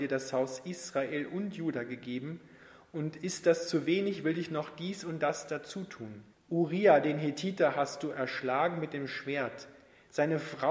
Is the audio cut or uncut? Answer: cut